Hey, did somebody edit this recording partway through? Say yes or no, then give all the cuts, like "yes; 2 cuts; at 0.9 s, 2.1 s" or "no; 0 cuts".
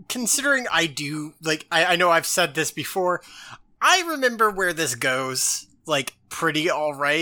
no; 0 cuts